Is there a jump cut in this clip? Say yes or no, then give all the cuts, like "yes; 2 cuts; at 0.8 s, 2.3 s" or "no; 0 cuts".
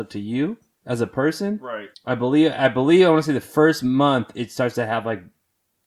yes; 1 cut; at 1.9 s